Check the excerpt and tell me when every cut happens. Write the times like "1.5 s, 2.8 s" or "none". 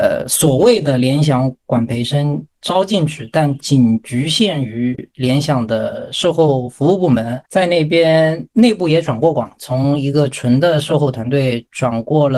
7.5 s